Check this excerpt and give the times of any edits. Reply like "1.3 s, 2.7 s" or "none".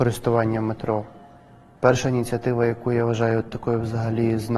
1.8 s